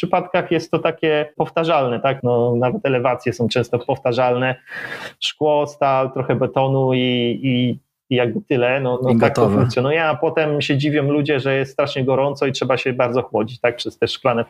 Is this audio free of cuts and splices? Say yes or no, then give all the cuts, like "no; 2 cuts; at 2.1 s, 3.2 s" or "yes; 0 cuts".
no; 1 cut; at 2.2 s